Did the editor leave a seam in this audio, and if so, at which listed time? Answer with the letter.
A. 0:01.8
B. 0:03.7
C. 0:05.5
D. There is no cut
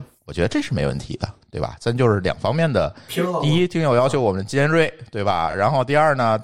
D